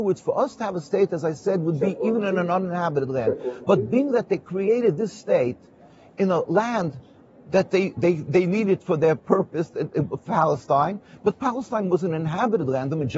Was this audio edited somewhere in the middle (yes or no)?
no